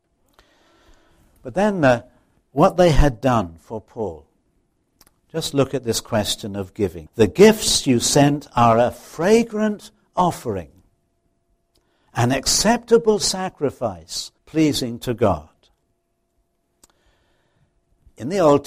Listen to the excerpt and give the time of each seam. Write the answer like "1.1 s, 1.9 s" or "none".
2.5 s, 7.1 s, 14.4 s